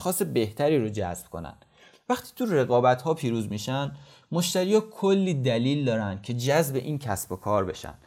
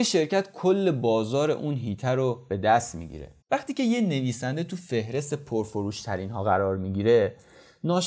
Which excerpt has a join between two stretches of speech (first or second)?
second